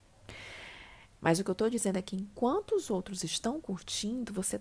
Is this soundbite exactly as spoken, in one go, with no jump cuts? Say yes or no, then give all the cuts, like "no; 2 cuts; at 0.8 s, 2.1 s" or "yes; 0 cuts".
no; 1 cut; at 1.2 s